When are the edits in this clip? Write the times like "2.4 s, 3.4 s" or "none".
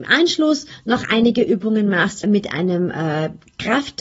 2.2 s